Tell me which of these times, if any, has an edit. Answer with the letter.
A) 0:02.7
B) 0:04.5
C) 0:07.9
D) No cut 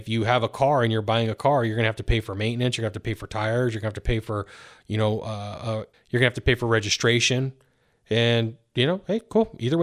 D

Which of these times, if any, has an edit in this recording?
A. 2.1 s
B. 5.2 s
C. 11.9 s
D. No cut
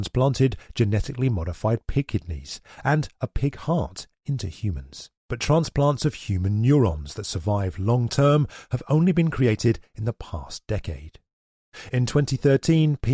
B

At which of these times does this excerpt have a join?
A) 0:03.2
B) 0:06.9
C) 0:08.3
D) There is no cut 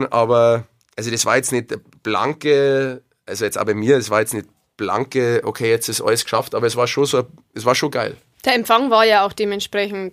C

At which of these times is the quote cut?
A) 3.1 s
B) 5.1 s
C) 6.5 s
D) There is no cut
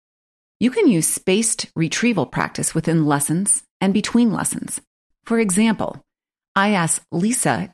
B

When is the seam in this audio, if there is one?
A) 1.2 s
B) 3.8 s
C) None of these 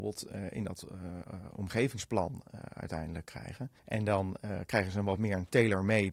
B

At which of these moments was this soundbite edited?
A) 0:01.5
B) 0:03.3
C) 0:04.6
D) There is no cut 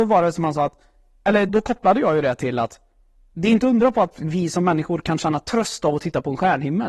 A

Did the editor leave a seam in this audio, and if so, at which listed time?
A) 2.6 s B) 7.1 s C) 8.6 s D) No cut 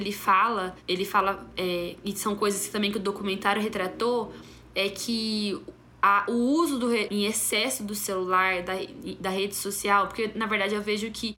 B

